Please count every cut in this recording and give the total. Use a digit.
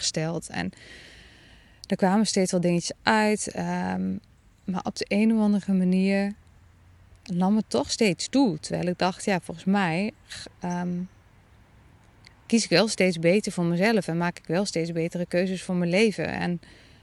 0